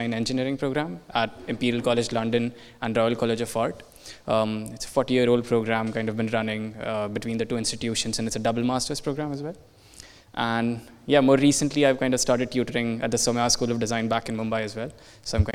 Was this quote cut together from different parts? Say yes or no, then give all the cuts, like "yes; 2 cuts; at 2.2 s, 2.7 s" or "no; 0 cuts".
no; 0 cuts